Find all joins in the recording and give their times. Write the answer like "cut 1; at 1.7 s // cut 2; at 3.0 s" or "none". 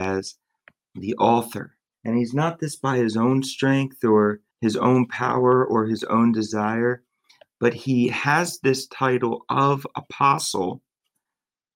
cut 1; at 1.9 s // cut 2; at 4.5 s